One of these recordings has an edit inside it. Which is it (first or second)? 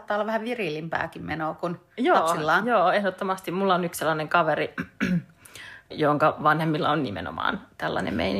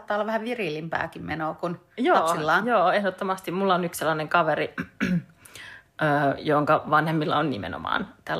first